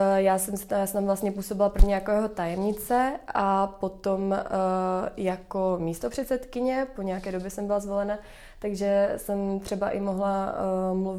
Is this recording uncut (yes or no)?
yes